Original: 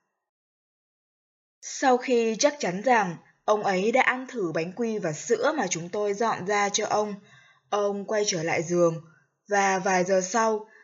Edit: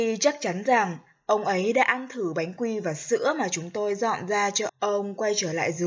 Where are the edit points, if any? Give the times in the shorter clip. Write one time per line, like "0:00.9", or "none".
0:04.7